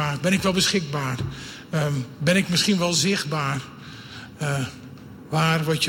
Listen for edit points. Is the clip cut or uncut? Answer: uncut